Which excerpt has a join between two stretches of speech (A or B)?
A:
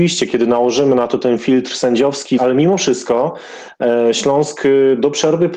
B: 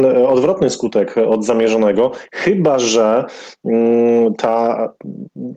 A